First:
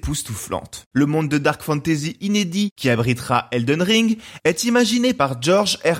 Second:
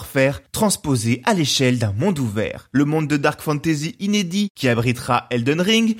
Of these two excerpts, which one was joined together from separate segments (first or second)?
first